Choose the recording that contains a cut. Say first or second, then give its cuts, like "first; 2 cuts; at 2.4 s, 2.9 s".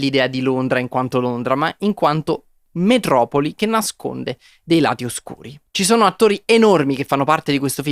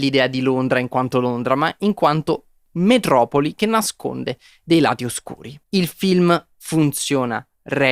second; 1 cut; at 5.6 s